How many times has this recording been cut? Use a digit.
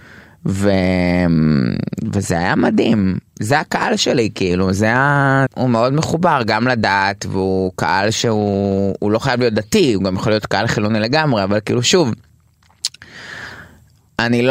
1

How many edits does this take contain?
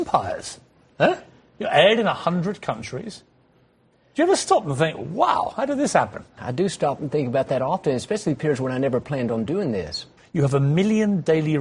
2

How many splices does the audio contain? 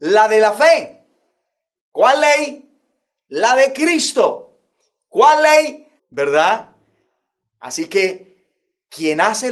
1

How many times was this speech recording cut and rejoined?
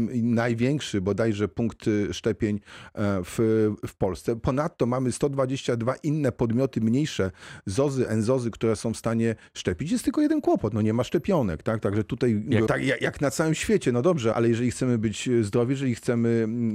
2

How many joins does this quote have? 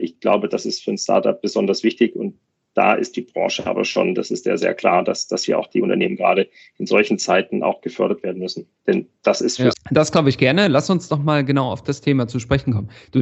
1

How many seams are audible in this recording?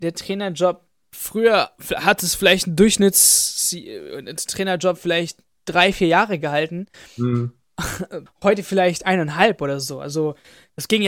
1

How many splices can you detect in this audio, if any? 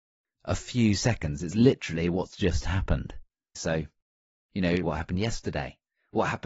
2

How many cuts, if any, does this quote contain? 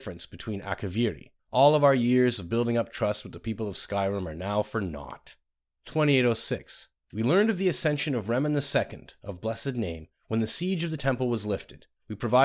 0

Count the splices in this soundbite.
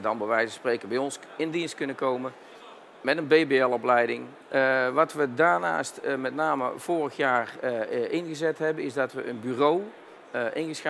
1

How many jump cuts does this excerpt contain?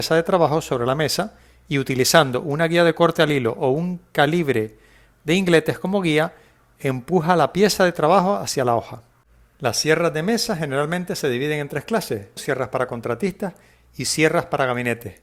1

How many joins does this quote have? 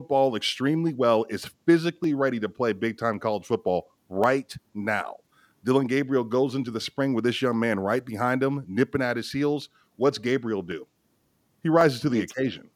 0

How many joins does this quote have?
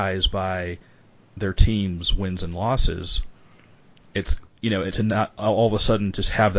1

